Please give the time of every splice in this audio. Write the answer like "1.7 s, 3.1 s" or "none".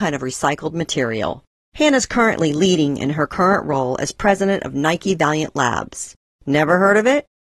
none